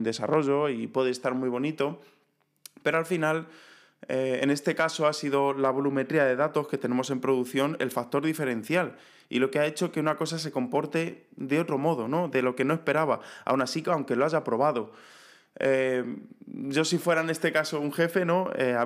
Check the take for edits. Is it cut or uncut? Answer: uncut